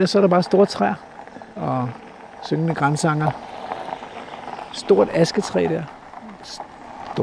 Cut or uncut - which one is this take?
cut